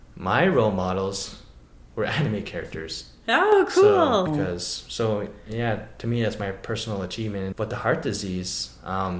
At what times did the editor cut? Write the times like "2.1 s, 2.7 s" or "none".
4.3 s, 7.5 s